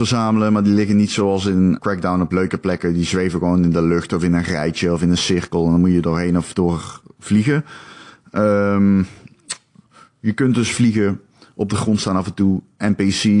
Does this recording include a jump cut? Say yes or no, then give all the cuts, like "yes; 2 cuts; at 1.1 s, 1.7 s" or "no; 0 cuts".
yes; 1 cut; at 1.8 s